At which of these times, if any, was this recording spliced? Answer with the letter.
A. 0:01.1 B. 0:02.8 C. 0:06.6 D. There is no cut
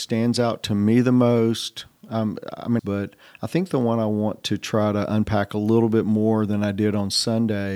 B